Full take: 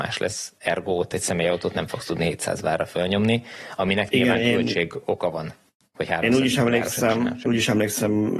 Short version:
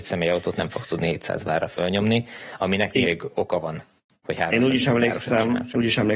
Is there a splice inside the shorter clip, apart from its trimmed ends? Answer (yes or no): yes